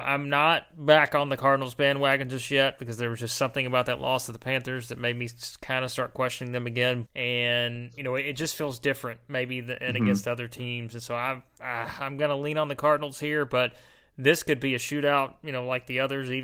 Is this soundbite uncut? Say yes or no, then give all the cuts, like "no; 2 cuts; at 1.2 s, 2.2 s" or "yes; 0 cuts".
no; 1 cut; at 7.1 s